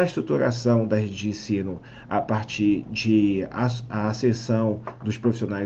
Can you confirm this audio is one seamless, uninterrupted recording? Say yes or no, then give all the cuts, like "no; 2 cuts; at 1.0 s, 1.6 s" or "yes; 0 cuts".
yes; 0 cuts